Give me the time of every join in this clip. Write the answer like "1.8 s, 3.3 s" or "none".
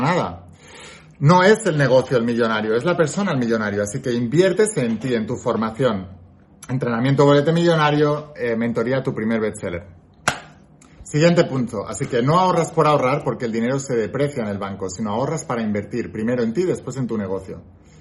none